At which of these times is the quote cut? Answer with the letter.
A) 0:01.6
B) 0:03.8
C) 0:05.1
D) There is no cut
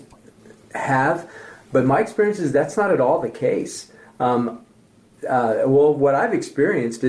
C